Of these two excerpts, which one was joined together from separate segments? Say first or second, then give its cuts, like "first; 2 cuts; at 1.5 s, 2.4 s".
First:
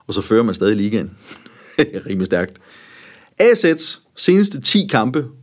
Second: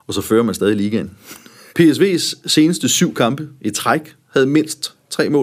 second; 1 cut; at 1.7 s